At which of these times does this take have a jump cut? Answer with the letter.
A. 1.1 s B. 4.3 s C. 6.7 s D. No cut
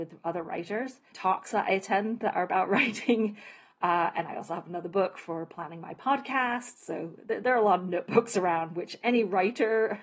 A